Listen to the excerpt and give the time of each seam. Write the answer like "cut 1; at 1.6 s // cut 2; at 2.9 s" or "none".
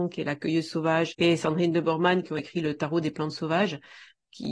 cut 1; at 1.1 s

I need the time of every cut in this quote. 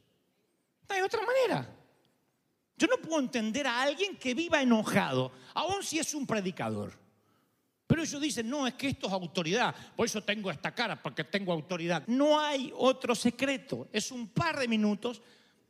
cut 1; at 12.0 s

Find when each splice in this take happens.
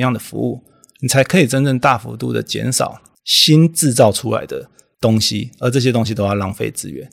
none

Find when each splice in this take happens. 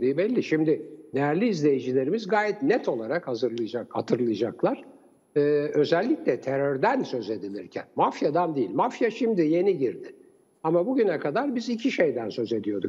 none

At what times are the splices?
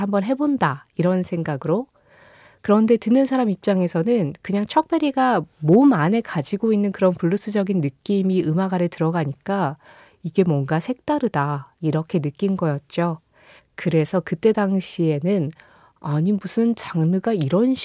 cut 1; at 11.8 s // cut 2; at 13.6 s

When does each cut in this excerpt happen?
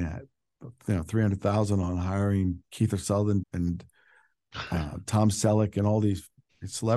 cut 1; at 3.4 s

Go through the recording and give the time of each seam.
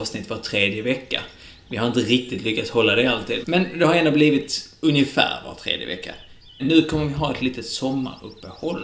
cut 1; at 3.4 s // cut 2; at 6.6 s

